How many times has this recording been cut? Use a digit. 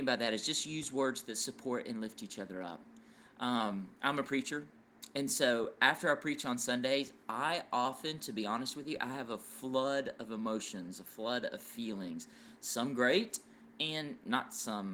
0